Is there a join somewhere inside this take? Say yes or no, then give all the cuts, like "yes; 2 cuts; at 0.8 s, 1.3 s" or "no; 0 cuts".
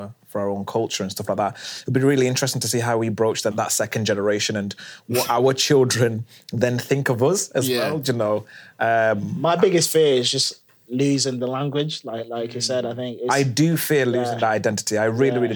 yes; 1 cut; at 3.5 s